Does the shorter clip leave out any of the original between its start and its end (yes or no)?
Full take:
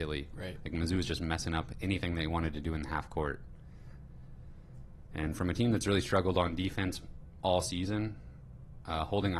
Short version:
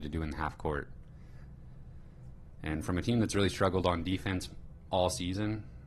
no